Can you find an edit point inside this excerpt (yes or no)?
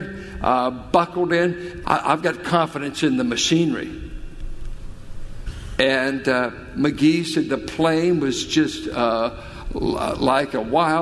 yes